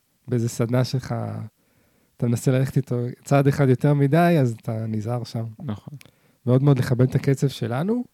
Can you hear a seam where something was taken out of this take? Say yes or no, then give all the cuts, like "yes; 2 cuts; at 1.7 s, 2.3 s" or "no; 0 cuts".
no; 0 cuts